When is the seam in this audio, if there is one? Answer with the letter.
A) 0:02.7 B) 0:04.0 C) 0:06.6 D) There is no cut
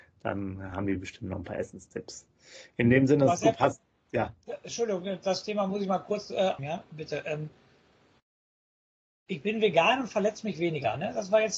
C